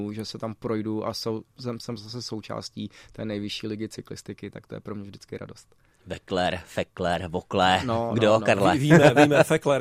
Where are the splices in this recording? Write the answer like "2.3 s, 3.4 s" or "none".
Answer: none